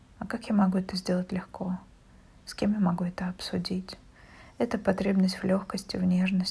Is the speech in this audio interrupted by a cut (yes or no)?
no